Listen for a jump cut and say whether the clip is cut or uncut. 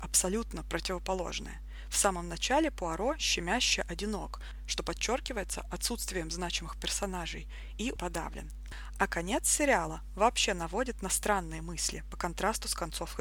cut